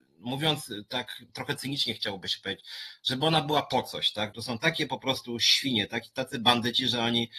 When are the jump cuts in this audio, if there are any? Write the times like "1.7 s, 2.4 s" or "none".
1.3 s, 4.3 s